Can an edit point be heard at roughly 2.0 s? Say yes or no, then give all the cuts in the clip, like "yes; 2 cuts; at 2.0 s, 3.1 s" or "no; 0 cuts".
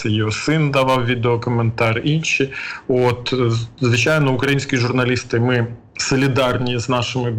no; 0 cuts